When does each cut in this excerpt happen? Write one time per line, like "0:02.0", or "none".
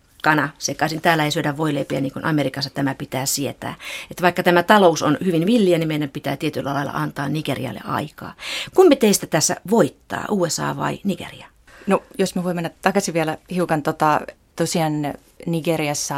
none